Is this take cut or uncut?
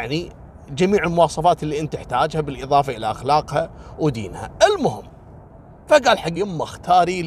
cut